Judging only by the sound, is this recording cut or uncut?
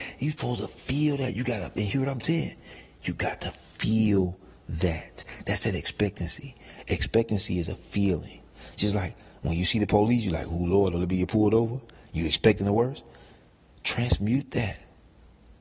uncut